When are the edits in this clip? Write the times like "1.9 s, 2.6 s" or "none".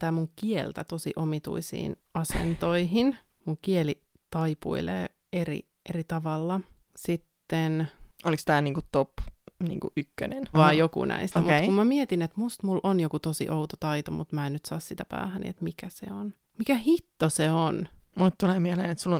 10.5 s